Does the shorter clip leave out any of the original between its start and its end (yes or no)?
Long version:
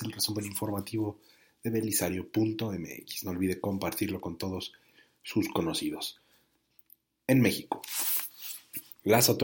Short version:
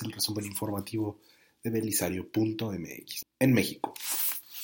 yes